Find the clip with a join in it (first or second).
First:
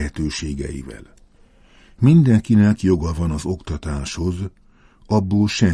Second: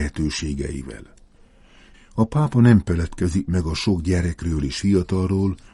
second